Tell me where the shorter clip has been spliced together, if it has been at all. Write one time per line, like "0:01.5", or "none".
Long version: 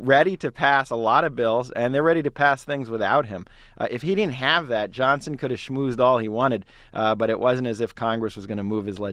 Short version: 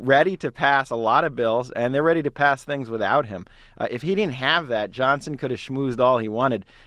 none